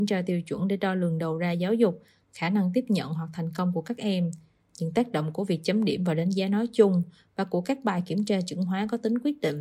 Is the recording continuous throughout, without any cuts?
yes; 0 cuts

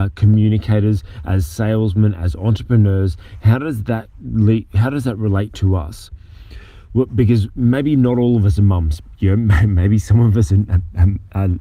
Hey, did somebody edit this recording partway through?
no; 0 cuts

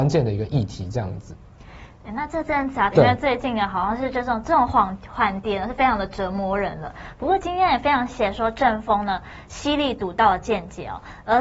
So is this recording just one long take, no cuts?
no; 2 cuts; at 2.9 s, 8.1 s

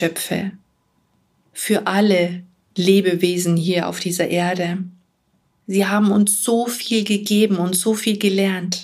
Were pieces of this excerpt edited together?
yes; 1 cut; at 5.5 s

